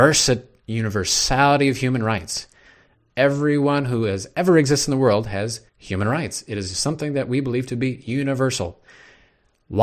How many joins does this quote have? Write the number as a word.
two